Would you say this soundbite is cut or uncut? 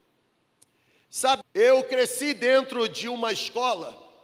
cut